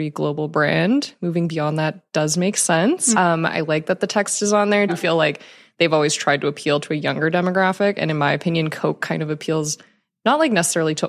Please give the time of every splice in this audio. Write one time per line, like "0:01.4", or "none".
0:03.1
0:04.9